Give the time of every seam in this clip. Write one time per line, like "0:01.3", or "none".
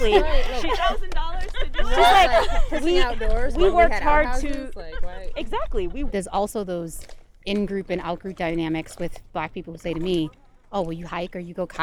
0:06.1